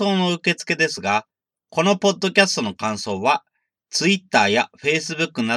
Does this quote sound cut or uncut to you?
uncut